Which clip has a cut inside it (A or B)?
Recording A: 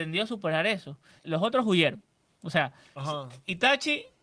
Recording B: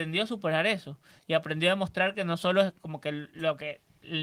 A